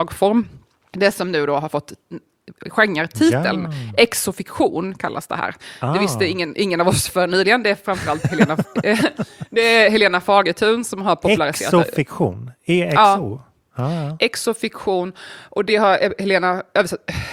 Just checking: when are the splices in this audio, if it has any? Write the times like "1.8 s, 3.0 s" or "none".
none